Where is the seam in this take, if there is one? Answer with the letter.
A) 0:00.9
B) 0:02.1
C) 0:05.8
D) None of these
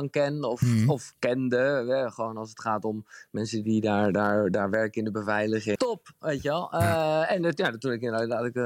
C